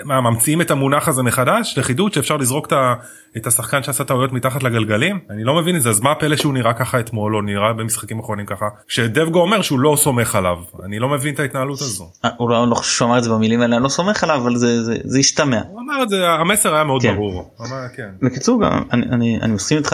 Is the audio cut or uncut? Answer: cut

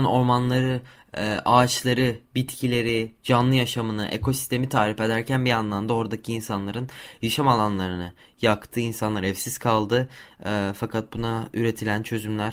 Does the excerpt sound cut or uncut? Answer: uncut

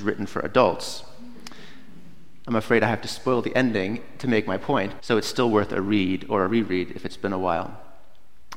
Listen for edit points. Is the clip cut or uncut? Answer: cut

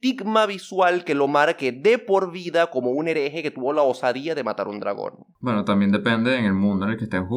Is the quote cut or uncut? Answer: uncut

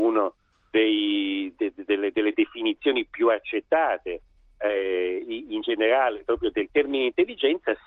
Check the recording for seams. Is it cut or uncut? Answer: cut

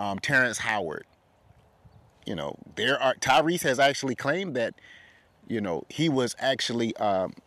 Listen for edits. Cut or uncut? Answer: uncut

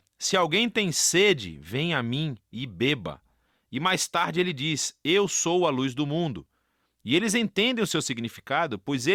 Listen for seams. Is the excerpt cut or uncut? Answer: cut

